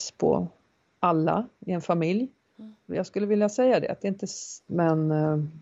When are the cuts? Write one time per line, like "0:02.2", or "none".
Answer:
0:02.9
0:04.7